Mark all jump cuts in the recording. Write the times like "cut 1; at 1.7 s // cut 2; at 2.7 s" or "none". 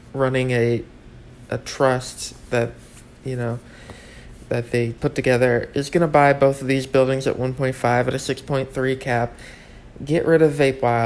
cut 1; at 5.0 s